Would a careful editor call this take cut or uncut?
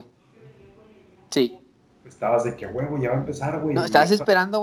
uncut